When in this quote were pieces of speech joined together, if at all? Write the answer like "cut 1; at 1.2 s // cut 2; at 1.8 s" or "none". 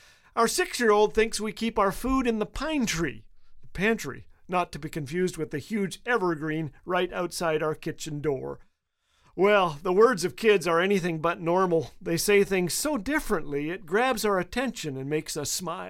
none